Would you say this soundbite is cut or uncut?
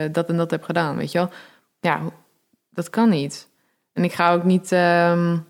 uncut